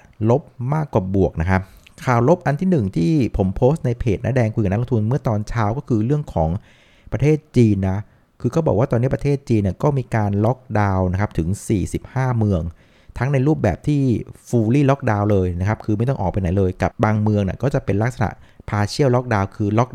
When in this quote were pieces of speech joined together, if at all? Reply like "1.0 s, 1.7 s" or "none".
16.9 s

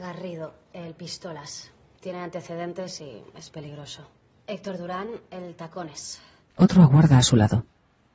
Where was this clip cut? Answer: 2.0 s, 4.3 s, 6.5 s

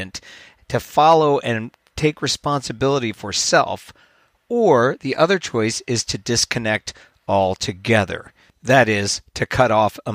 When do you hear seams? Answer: none

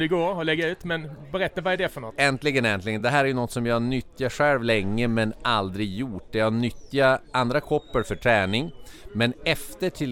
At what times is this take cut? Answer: none

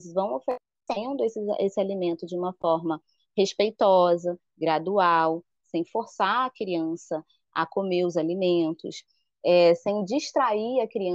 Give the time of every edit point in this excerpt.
none

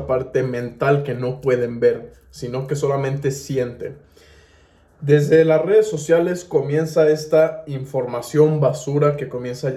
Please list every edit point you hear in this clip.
none

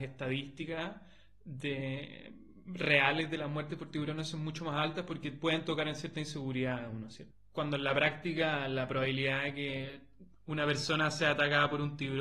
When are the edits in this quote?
none

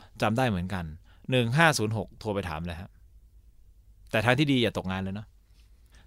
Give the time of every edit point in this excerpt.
none

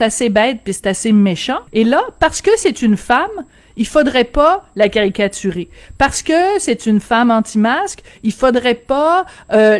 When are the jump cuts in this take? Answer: 1.7 s

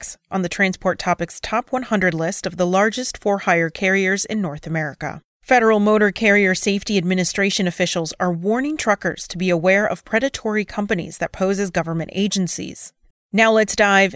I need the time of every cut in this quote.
5.3 s, 13.1 s

